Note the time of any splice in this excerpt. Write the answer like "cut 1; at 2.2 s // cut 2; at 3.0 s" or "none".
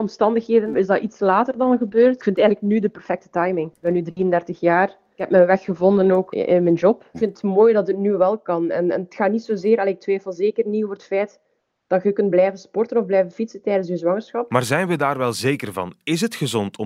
cut 1; at 7.1 s